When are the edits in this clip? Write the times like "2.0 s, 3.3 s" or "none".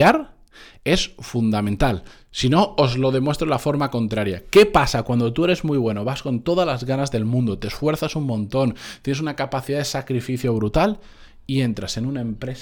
none